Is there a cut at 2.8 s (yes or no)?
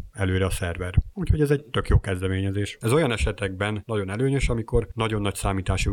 yes